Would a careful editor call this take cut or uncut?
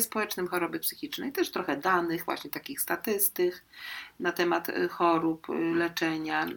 uncut